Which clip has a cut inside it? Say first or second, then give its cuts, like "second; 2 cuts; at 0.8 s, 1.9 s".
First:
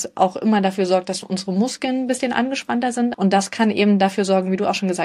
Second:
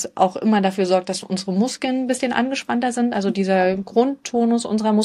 first; 1 cut; at 3.1 s